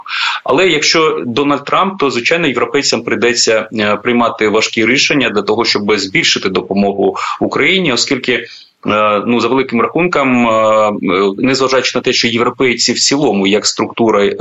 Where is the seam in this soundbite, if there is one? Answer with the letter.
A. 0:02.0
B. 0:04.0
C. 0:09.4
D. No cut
D